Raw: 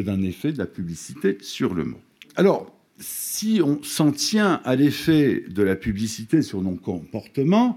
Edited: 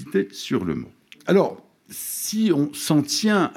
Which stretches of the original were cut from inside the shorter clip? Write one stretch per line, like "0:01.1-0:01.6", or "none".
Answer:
none